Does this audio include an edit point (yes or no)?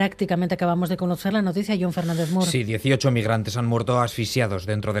no